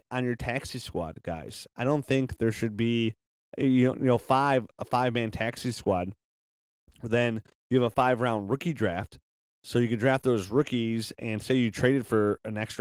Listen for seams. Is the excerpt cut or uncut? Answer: uncut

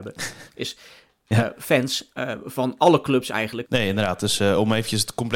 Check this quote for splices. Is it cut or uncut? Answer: cut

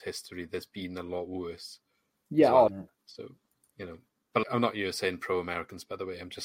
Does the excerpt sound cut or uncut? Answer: cut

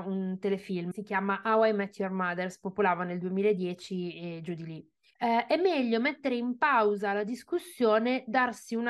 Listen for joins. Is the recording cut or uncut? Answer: cut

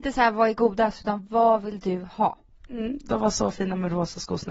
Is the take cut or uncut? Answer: cut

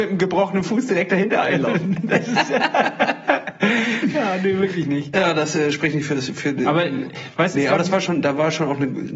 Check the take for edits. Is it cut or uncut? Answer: uncut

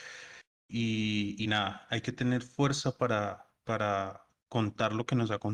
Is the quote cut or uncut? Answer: uncut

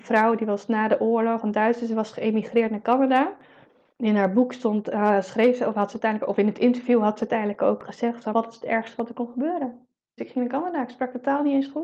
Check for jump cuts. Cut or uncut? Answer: cut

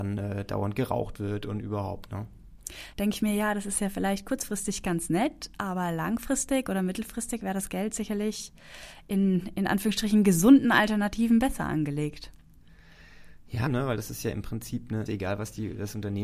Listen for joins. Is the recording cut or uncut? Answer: cut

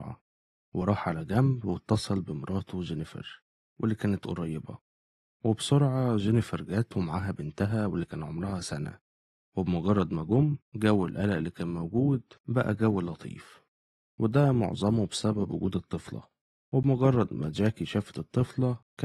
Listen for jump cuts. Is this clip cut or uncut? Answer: uncut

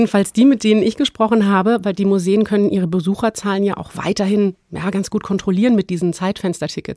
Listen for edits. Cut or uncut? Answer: uncut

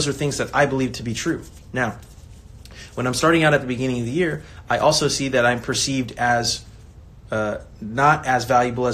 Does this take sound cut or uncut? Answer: uncut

